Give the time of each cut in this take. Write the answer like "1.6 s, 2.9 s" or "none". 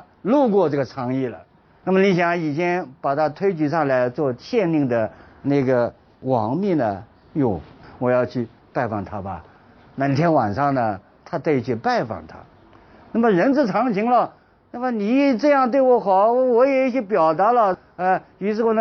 none

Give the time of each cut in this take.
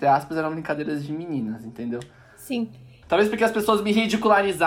3.0 s

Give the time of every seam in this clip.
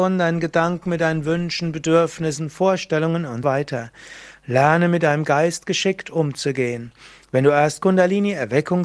3.4 s

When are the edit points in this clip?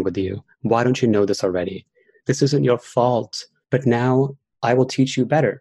2.2 s, 3.6 s

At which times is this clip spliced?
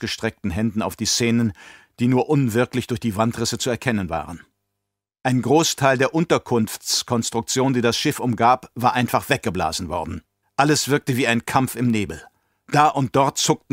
10.4 s

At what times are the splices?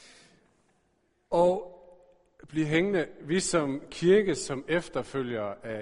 none

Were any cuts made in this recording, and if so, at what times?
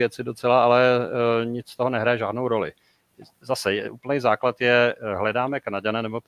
none

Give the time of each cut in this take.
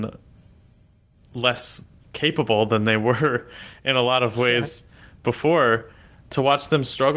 2.0 s

